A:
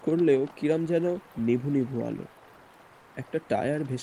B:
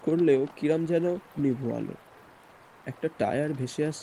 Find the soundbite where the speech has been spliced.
B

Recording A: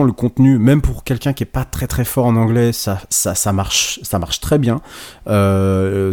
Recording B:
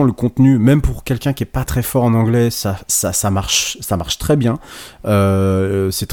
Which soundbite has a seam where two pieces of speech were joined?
B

